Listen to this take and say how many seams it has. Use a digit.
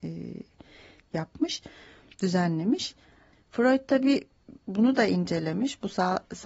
1